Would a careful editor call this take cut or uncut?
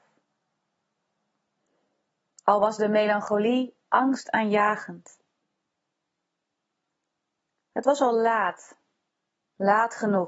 uncut